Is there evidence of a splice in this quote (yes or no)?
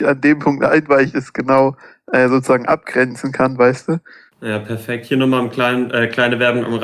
yes